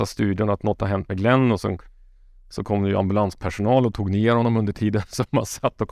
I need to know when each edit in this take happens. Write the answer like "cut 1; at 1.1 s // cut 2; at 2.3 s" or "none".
none